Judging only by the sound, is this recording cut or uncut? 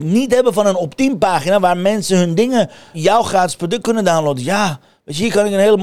cut